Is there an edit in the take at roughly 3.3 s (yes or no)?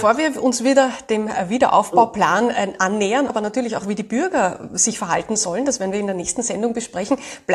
yes